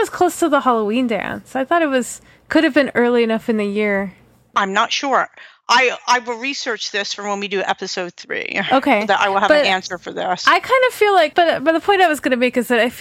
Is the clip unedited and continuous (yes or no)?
no